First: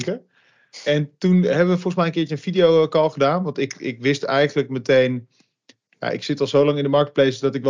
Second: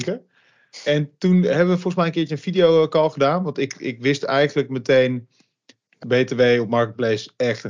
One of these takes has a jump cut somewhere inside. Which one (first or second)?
second